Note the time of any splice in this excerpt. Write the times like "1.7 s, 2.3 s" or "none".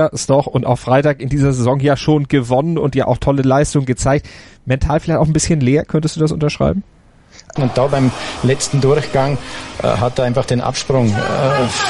7.6 s